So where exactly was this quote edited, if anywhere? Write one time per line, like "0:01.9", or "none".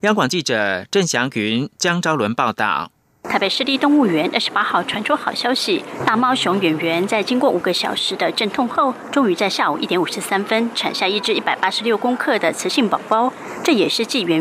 none